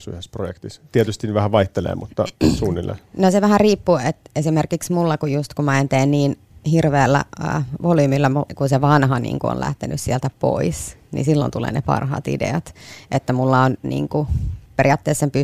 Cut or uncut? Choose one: cut